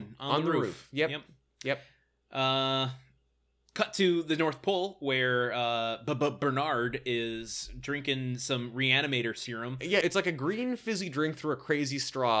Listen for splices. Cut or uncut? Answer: cut